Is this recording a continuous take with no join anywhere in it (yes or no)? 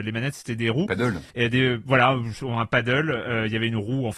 no